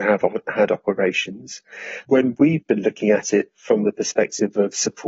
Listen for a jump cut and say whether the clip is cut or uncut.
cut